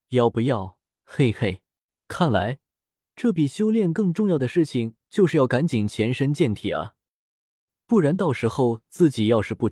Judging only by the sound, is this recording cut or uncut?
cut